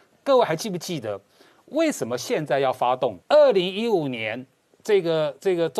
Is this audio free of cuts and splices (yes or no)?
no